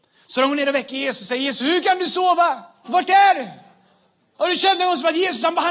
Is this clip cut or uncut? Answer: cut